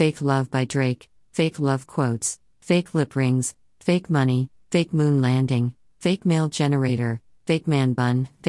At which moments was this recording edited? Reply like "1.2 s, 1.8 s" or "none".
none